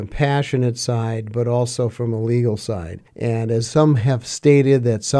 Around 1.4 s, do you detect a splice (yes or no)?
no